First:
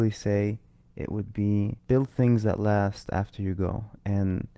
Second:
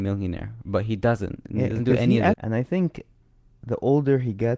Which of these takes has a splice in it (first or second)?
second